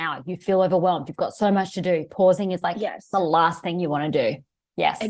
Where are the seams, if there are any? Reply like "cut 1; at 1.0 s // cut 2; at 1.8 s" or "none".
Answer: none

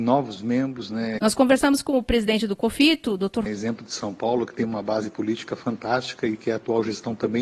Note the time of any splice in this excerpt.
cut 1; at 1.2 s // cut 2; at 3.5 s

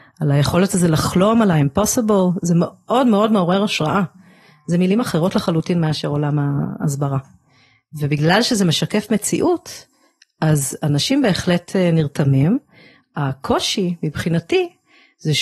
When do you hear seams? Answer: none

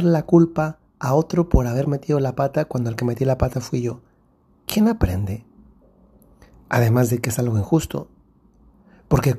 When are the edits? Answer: none

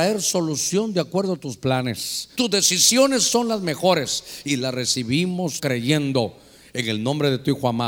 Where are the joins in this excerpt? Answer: cut 1; at 2.4 s // cut 2; at 5.6 s

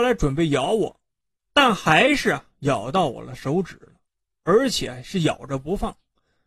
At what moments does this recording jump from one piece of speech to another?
cut 1; at 1.5 s

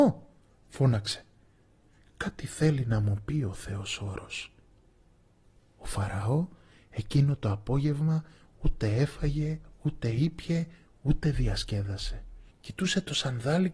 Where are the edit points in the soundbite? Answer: cut 1; at 2.0 s // cut 2; at 12.5 s

